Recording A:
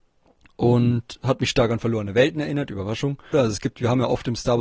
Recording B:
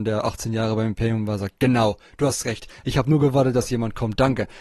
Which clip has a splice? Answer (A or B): A